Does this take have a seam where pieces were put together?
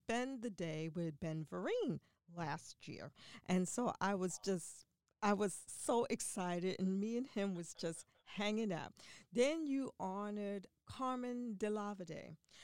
no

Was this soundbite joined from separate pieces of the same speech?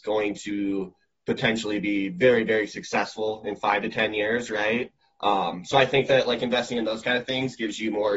no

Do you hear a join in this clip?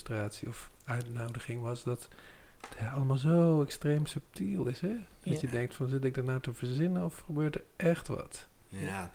no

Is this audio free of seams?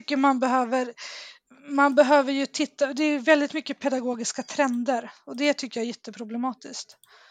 yes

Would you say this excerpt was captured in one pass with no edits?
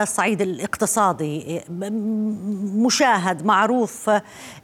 yes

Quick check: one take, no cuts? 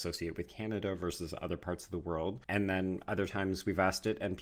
no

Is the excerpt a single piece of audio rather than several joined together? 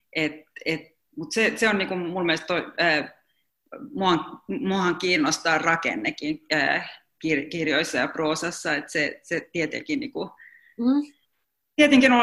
yes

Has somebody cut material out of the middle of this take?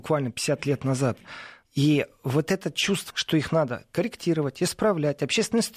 yes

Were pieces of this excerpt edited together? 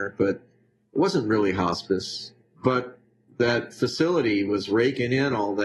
no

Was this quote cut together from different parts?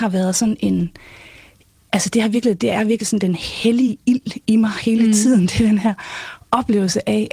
no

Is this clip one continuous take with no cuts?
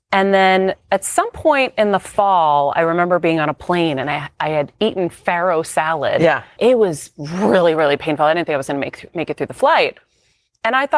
no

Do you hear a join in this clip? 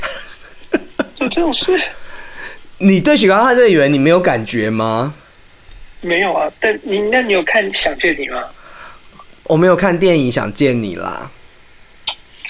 no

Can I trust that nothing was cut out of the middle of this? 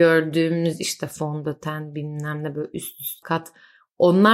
no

